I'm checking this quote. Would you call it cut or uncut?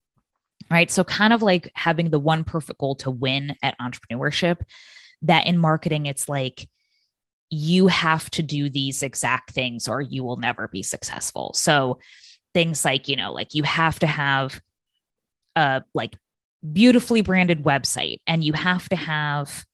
uncut